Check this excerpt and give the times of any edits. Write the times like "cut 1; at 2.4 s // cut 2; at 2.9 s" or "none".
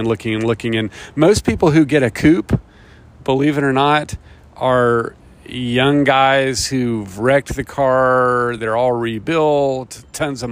none